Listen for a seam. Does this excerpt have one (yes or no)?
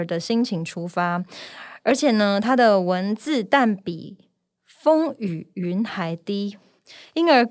no